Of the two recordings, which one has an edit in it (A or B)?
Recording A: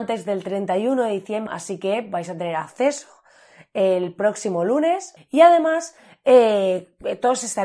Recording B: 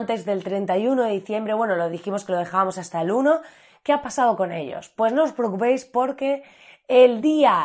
A